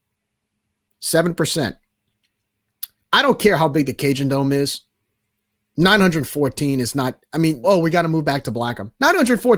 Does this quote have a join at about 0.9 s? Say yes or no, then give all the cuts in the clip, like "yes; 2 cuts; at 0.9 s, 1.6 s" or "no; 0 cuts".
no; 1 cut; at 7.6 s